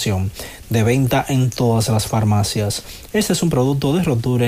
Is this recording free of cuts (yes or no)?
yes